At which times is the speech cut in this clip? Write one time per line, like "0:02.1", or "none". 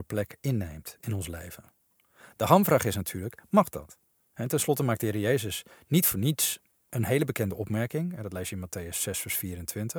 0:04.3